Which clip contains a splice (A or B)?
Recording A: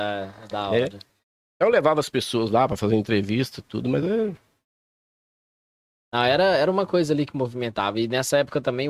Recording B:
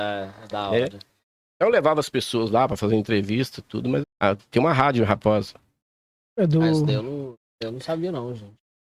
B